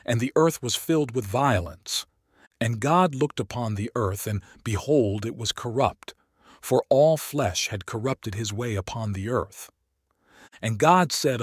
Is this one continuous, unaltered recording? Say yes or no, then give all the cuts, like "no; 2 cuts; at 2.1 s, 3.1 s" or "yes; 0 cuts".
yes; 0 cuts